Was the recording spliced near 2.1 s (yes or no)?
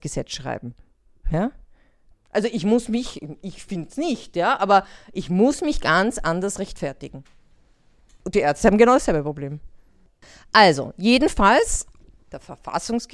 yes